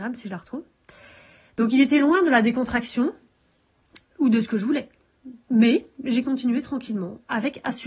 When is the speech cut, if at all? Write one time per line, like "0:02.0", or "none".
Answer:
none